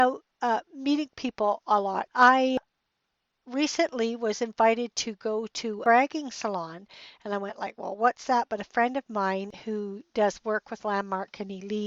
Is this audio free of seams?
no; 1 cut; at 2.1 s

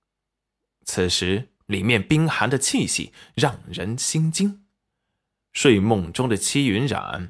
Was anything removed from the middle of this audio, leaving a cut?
yes; 1 cut; at 1.6 s

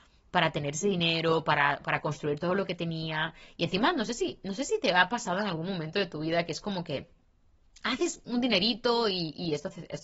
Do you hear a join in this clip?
no; 0 cuts

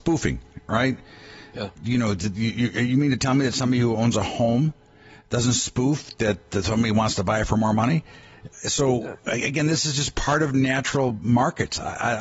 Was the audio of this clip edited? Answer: yes; 1 cut; at 1.8 s

